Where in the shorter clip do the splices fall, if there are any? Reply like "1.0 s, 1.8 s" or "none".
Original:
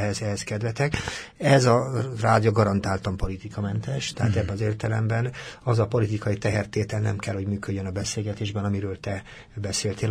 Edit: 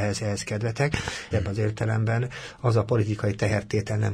1.3 s